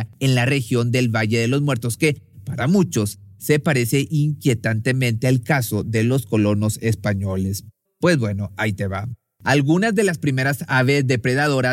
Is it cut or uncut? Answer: cut